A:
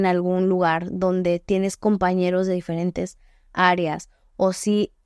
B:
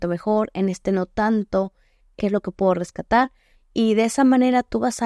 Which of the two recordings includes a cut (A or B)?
B